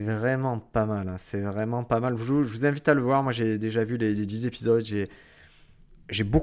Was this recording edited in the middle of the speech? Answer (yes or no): no